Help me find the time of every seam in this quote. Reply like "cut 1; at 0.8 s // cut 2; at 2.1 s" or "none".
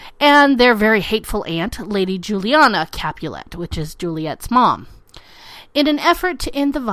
none